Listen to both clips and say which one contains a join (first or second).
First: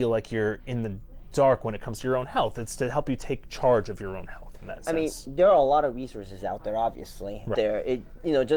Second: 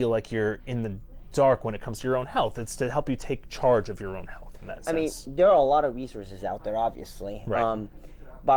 first